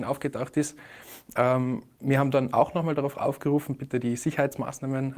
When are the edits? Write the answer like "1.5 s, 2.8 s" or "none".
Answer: none